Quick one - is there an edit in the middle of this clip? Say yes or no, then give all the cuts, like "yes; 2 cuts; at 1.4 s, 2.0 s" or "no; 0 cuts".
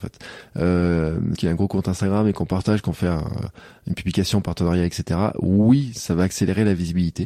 yes; 1 cut; at 1.4 s